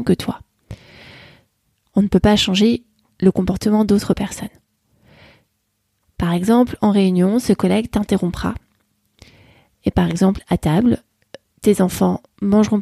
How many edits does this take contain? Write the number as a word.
zero